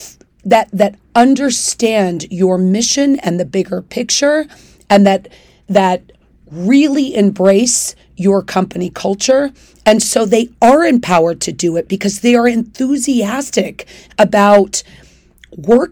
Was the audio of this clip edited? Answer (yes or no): no